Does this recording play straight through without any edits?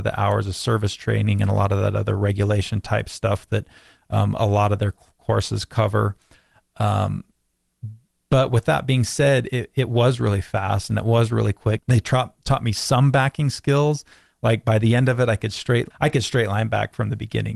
no; 2 cuts; at 11.8 s, 15.9 s

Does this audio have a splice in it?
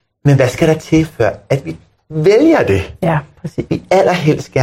yes; 1 cut; at 3.7 s

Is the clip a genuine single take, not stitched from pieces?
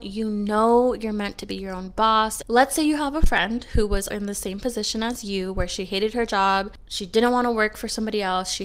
no; 2 cuts; at 2.4 s, 4.1 s

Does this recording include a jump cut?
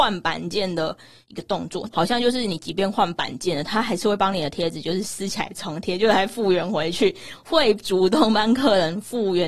yes; 1 cut; at 1.9 s

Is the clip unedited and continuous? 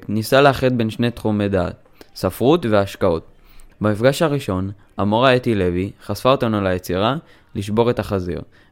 no; 1 cut; at 3.7 s

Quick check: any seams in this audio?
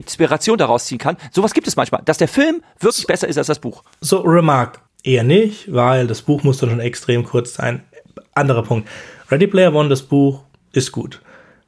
yes; 1 cut; at 4.9 s

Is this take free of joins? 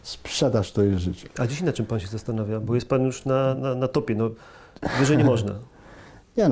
yes; 0 cuts

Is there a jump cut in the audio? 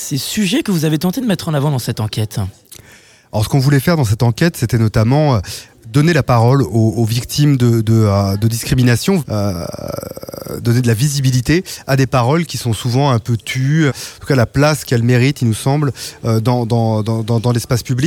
yes; 2 cuts; at 9.2 s, 13.9 s

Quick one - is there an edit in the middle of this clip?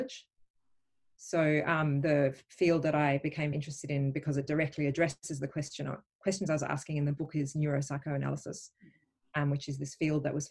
yes; 1 cut; at 3.5 s

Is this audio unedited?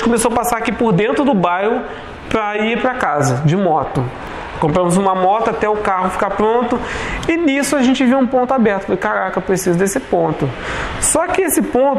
yes; 0 cuts

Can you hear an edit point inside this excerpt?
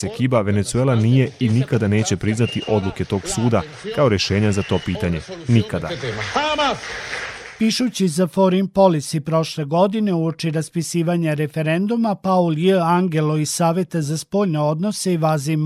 no; 0 cuts

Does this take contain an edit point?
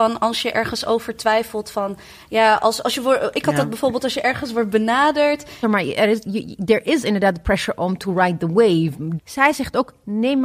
yes; 2 cuts; at 5.6 s, 9.2 s

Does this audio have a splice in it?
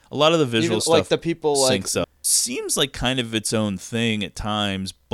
yes; 1 cut; at 2.0 s

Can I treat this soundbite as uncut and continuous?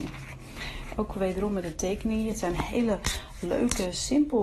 no; 1 cut; at 0.9 s

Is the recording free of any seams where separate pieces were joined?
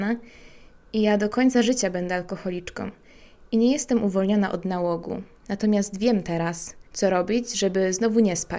no; 1 cut; at 6.9 s

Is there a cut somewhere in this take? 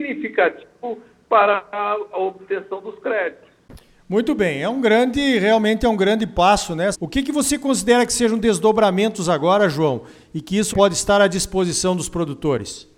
yes; 2 cuts; at 6.9 s, 10.7 s

